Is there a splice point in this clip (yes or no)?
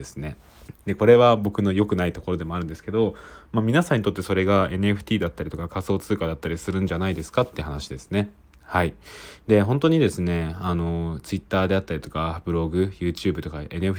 no